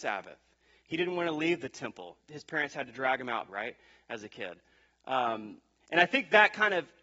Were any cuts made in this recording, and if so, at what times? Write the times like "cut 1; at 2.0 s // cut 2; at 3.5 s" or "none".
cut 1; at 3.5 s

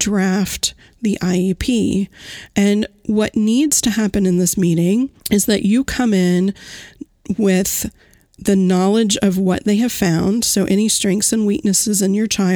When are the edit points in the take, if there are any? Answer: cut 1; at 5.2 s

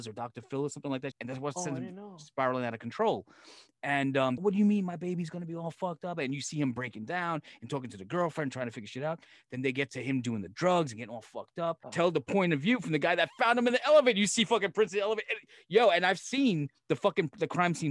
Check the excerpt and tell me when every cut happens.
cut 1; at 1.1 s // cut 2; at 4.4 s // cut 3; at 11.8 s

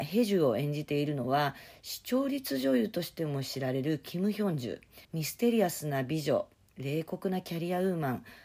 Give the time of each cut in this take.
cut 1; at 5.0 s

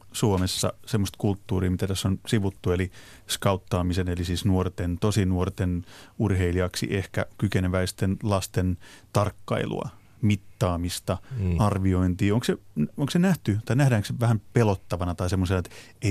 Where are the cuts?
none

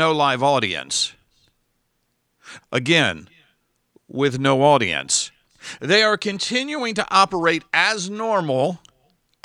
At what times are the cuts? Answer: cut 1; at 2.6 s // cut 2; at 5.8 s

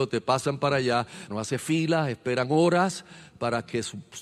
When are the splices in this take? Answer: cut 1; at 1.3 s

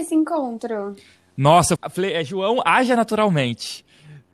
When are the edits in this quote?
cut 1; at 1.8 s

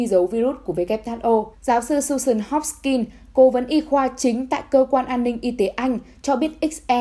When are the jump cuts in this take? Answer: cut 1; at 1.5 s

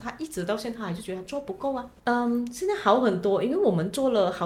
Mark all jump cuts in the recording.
cut 1; at 2.0 s

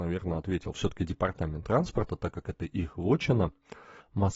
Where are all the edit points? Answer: none

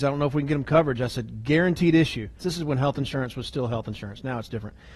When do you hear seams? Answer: cut 1; at 2.4 s

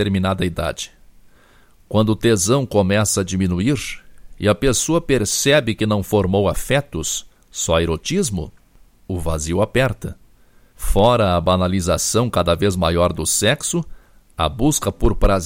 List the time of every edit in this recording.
cut 1; at 10.7 s

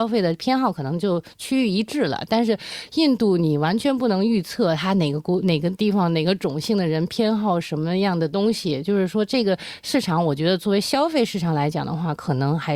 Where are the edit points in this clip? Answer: none

